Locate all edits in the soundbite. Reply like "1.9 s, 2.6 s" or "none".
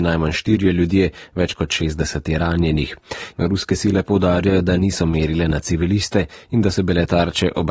3.3 s